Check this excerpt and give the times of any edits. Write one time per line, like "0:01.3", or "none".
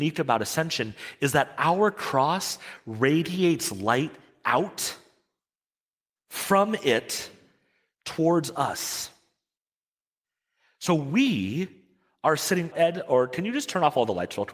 0:12.7